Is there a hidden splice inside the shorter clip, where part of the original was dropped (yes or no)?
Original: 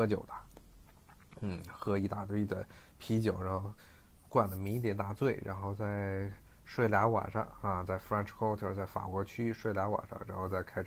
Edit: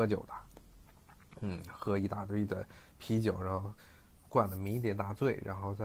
no